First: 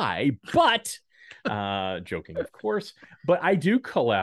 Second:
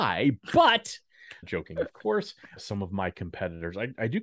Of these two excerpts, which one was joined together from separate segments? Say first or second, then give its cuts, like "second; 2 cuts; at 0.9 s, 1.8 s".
second; 2 cuts; at 1.4 s, 2.6 s